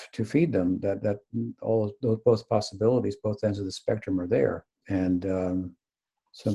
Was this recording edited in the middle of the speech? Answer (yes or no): yes